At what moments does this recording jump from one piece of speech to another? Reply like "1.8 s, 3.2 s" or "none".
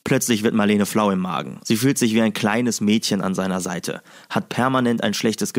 1.6 s